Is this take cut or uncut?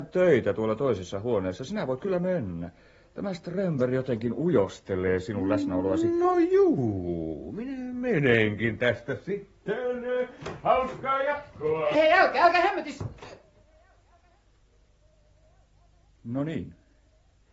cut